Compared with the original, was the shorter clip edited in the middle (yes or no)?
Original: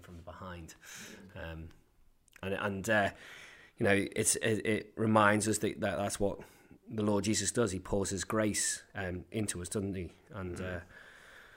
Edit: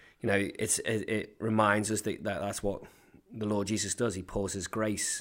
no